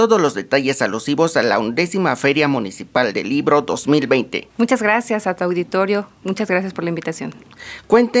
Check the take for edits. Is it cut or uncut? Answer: cut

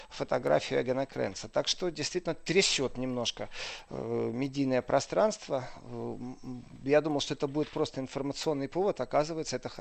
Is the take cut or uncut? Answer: uncut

